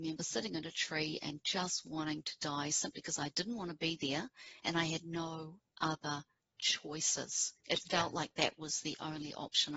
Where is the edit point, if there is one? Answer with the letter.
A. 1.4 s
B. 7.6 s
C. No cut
B